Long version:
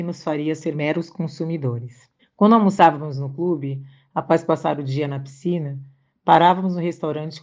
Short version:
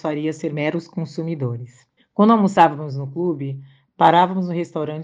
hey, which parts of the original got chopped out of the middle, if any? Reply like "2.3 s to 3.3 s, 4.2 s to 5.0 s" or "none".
4.1 s to 6.1 s